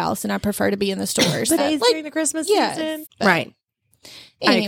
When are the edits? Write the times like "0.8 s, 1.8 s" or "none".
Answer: 1.6 s, 3.1 s